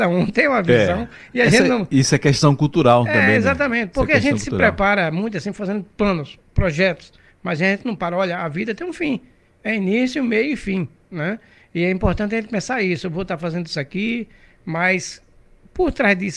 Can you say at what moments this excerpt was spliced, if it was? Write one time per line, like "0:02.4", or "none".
none